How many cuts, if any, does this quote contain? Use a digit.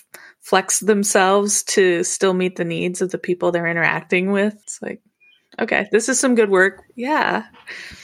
1